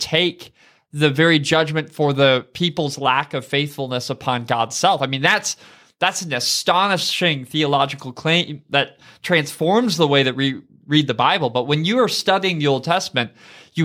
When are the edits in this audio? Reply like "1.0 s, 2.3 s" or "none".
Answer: none